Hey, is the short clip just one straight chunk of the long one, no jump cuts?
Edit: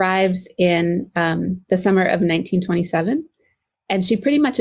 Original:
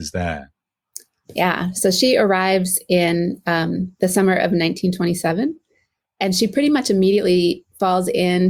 yes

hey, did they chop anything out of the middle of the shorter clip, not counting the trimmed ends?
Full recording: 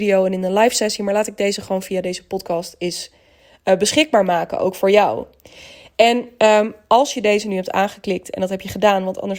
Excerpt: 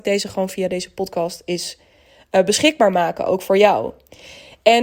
no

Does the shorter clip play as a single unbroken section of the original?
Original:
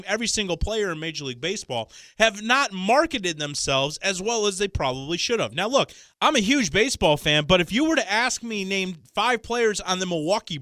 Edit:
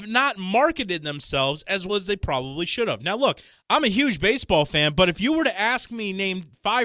no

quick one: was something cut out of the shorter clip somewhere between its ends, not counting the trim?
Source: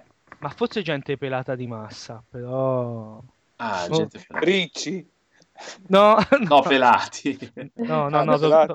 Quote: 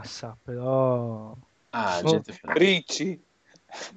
no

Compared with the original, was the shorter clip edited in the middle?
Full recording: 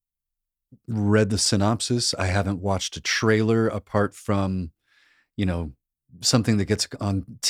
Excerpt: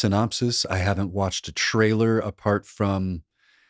no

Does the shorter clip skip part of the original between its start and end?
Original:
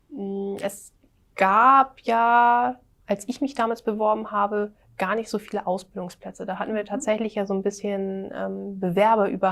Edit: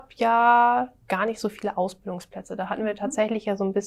yes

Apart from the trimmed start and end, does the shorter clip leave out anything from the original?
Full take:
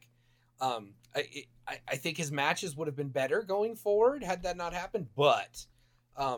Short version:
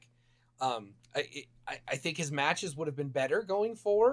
no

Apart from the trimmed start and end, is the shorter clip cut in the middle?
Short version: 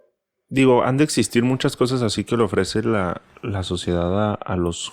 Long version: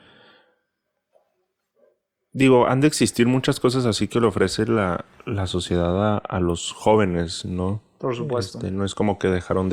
no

